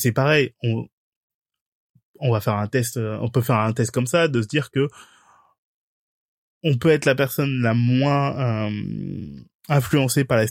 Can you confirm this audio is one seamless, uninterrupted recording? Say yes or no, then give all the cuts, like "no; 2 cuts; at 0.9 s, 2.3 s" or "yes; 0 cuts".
yes; 0 cuts